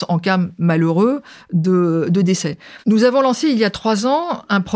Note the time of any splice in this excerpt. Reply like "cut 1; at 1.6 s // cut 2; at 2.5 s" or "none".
cut 1; at 2.8 s